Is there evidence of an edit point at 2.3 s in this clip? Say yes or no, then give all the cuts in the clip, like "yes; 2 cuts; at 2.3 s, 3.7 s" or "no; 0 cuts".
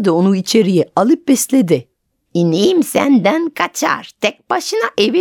yes; 1 cut; at 2.3 s